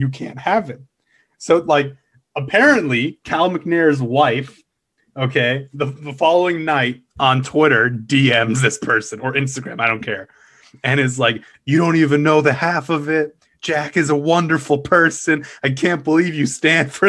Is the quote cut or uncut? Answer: uncut